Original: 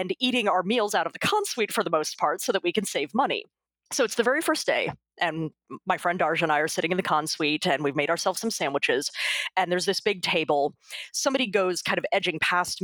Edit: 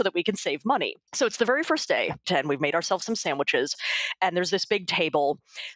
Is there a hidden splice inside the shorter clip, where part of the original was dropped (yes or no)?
yes